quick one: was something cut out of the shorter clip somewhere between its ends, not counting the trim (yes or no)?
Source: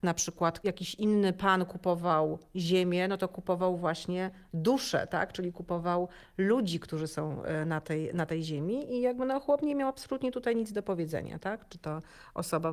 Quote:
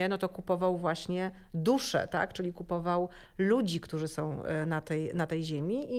no